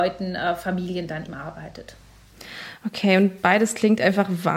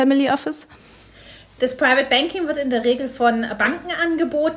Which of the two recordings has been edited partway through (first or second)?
first